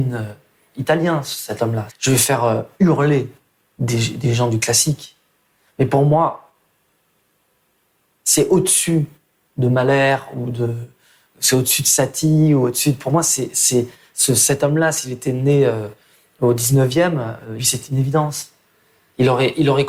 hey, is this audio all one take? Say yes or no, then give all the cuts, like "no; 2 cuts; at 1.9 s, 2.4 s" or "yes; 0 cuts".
no; 2 cuts; at 1.9 s, 17.6 s